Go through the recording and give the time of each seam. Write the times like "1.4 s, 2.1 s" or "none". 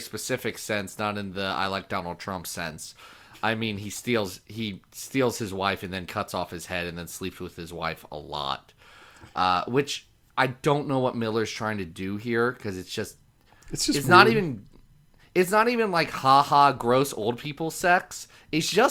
none

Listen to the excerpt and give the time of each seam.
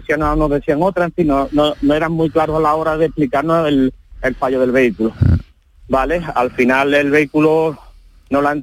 none

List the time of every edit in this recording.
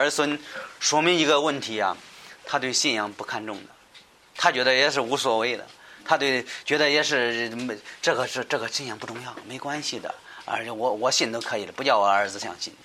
none

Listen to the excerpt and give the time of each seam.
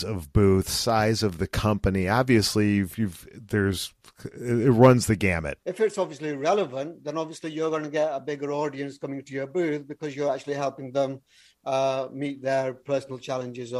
5.6 s

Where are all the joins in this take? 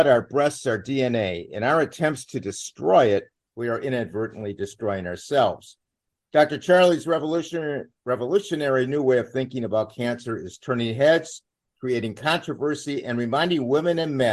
none

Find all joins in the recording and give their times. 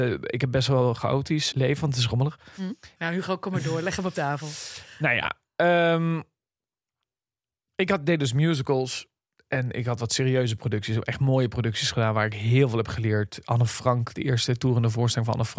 1.5 s, 3.0 s

